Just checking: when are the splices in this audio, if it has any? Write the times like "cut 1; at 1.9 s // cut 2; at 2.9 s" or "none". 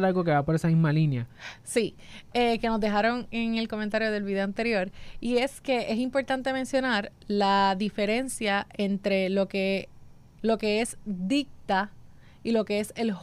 cut 1; at 10.4 s